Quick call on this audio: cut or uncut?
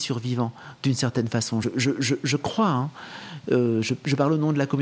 uncut